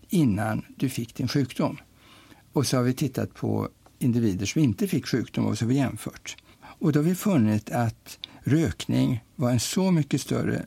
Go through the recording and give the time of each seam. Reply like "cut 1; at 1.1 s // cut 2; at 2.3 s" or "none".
cut 1; at 6.5 s

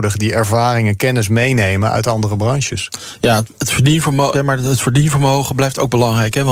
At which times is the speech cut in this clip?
cut 1; at 4.3 s

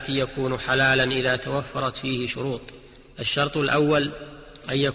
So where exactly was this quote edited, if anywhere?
none

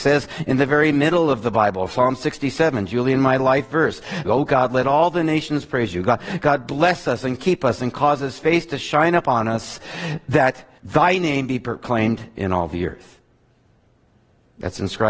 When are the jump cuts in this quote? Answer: cut 1; at 4.2 s // cut 2; at 10.8 s

